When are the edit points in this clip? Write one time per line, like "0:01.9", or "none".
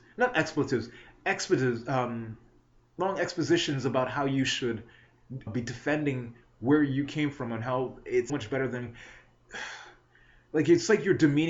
0:05.5
0:08.3